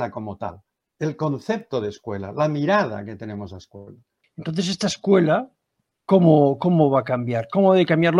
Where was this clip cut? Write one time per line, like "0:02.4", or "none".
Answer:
0:04.2